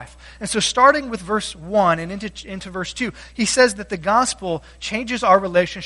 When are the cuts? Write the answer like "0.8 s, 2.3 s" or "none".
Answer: none